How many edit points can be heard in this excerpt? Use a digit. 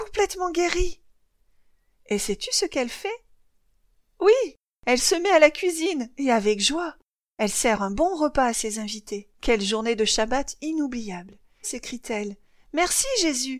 2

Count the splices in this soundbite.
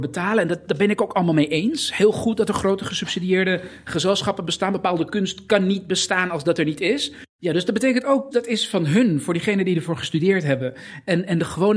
2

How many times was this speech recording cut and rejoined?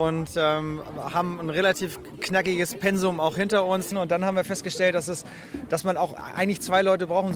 1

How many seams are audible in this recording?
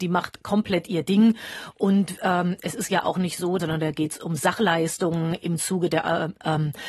1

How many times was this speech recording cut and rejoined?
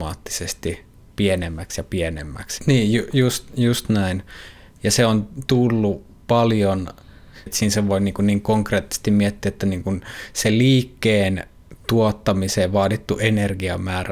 2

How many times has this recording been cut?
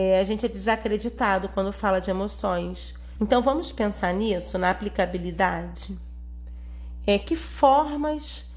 1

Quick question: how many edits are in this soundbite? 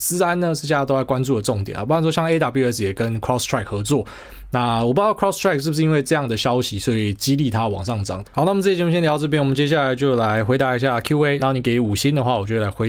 2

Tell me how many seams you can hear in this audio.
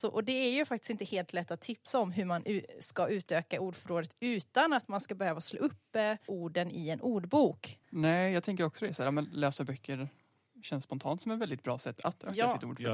1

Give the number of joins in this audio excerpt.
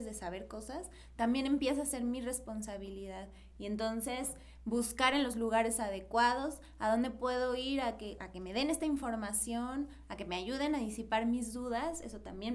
1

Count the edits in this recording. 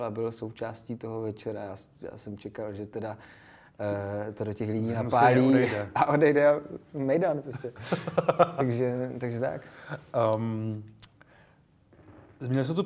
0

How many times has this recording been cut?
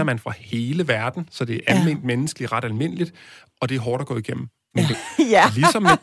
1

